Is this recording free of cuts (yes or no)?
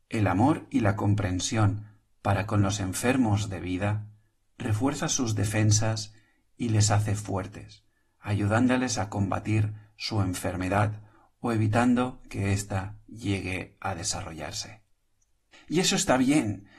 no